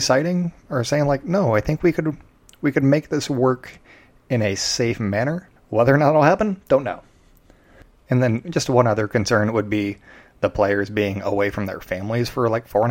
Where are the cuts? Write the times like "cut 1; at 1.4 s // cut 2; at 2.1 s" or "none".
cut 1; at 5.6 s